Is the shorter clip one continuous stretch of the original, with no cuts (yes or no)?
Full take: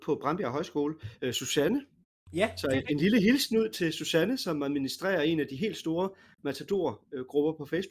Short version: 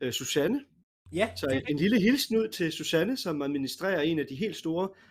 yes